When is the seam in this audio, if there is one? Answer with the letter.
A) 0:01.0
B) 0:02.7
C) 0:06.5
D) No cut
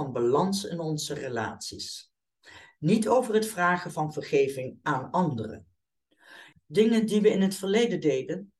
C